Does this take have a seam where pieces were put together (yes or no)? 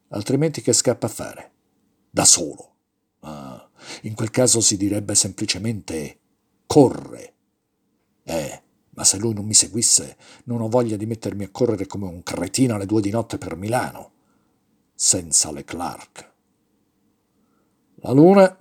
no